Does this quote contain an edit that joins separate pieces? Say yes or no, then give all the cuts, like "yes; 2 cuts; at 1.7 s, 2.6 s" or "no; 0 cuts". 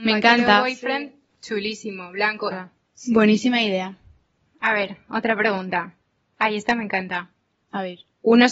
yes; 1 cut; at 2.5 s